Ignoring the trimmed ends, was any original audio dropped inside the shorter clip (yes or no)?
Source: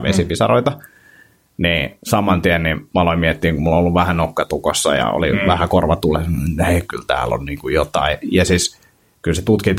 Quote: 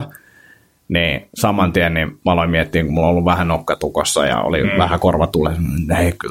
no